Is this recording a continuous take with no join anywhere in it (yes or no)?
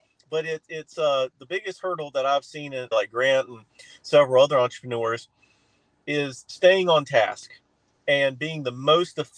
no